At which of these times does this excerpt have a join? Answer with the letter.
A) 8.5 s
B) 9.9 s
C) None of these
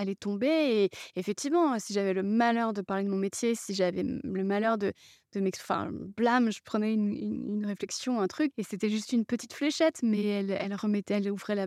A